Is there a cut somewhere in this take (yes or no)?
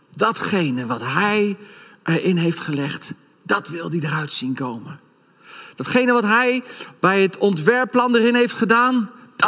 no